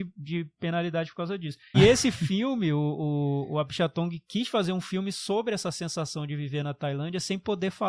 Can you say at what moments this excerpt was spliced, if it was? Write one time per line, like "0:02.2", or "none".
0:01.7